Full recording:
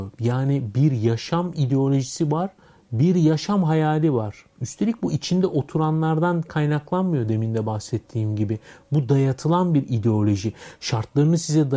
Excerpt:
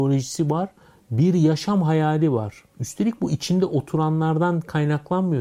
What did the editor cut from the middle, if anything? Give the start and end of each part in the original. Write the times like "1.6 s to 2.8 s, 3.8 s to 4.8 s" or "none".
none